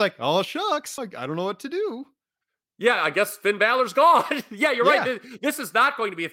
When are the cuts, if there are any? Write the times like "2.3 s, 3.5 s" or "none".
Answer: 1.0 s

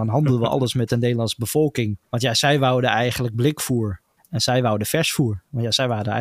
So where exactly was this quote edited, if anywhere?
2.0 s, 4.2 s

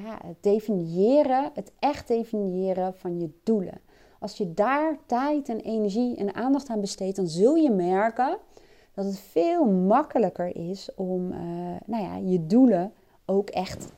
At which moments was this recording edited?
none

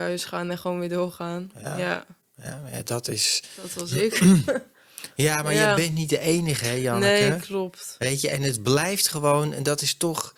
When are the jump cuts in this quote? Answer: none

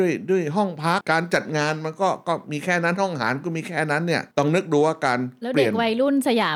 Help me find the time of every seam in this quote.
1.0 s, 4.3 s

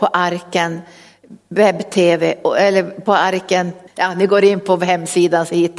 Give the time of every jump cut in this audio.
3.9 s

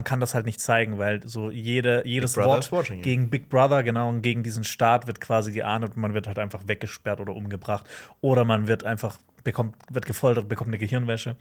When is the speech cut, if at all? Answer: none

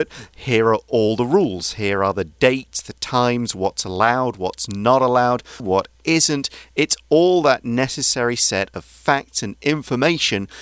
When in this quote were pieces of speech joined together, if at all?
5.6 s

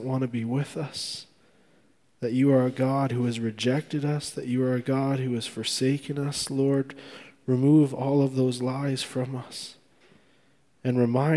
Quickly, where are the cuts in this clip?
none

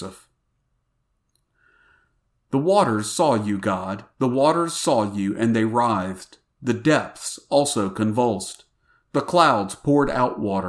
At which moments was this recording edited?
none

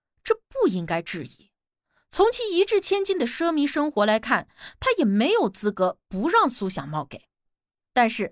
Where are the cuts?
none

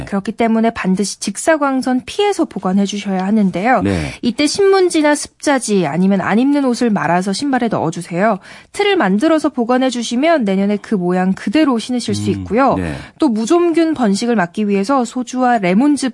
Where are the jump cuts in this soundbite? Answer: none

